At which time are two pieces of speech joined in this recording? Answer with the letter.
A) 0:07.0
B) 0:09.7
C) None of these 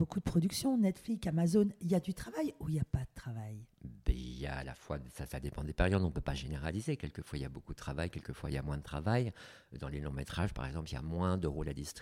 C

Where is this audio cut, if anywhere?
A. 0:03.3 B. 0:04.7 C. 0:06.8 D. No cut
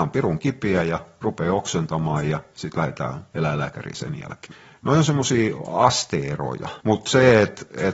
C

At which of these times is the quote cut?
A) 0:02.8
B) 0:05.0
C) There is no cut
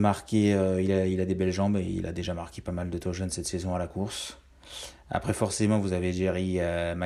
C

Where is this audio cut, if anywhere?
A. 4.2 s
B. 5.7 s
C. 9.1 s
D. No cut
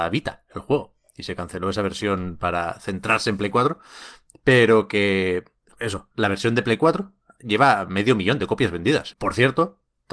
C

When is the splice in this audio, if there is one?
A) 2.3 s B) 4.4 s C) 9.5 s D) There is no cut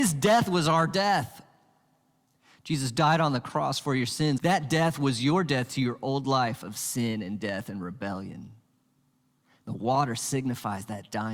B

